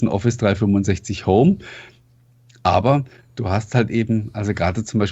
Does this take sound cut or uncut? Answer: uncut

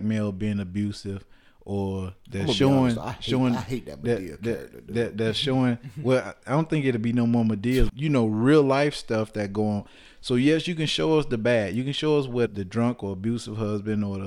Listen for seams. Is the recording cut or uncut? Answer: cut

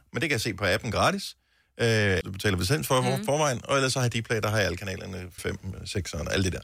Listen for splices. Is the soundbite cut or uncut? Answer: cut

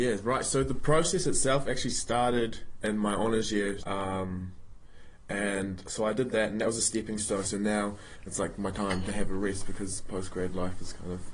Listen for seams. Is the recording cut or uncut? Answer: cut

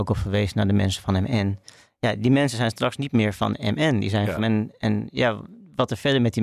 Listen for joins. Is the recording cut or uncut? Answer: cut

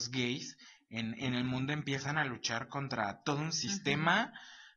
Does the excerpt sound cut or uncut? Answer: uncut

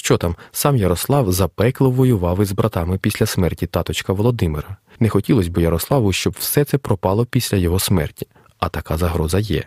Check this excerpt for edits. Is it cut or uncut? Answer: cut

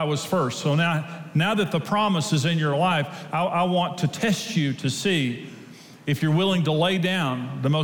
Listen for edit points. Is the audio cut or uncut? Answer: uncut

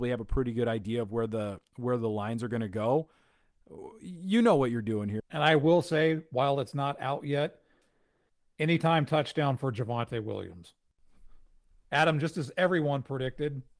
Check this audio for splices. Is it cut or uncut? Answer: cut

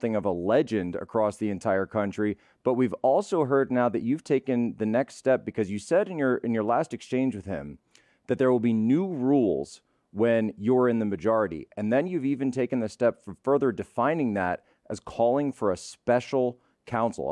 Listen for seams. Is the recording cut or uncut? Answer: uncut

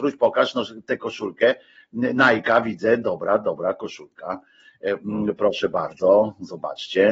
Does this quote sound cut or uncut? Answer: uncut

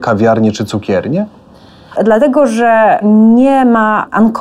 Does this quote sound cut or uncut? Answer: cut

